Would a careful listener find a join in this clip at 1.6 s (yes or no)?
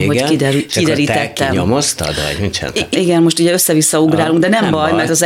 no